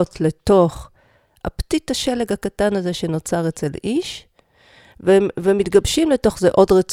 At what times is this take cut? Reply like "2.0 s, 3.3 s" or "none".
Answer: none